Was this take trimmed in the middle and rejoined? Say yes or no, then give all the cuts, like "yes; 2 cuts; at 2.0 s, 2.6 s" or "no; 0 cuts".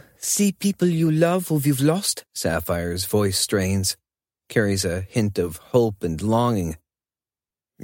yes; 1 cut; at 2.3 s